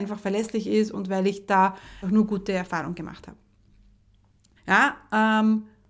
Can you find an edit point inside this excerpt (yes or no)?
yes